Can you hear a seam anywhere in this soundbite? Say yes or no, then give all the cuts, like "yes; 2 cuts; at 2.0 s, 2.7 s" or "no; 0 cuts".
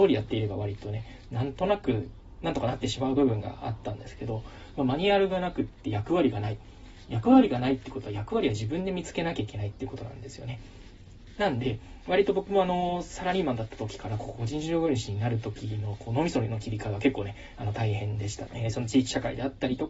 yes; 2 cuts; at 11.4 s, 18.5 s